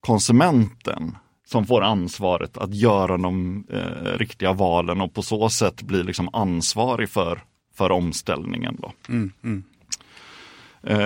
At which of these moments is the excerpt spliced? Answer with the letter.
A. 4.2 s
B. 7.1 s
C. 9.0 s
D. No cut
D